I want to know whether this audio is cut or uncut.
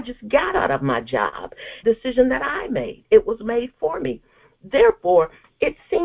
cut